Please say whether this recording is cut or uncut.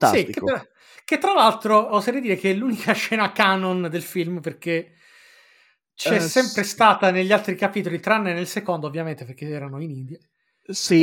cut